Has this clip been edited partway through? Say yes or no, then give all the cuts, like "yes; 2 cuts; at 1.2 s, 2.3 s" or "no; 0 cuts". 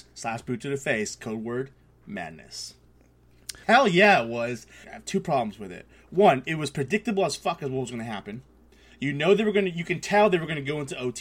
yes; 2 cuts; at 3.6 s, 4.8 s